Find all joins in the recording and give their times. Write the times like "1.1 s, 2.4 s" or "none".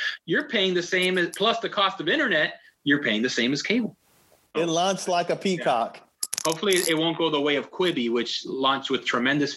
4.5 s